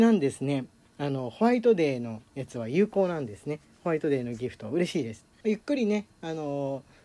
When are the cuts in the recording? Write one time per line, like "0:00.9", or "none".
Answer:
0:05.4